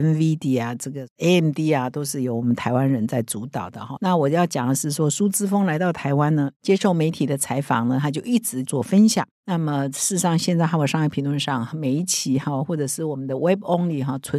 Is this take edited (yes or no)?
yes